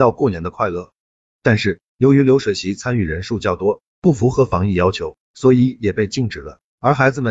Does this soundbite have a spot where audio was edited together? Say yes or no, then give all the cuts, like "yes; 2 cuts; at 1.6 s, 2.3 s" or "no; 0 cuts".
yes; 1 cut; at 3.9 s